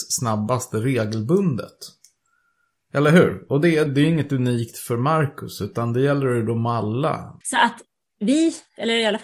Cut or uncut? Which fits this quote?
cut